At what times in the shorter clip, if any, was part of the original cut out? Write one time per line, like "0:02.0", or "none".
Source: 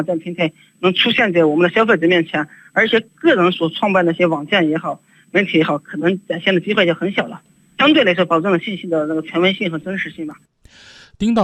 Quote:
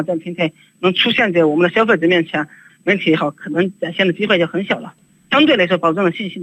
0:02.7